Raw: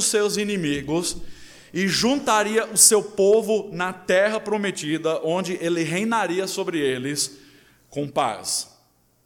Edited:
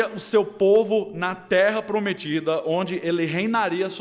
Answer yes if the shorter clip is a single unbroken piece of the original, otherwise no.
yes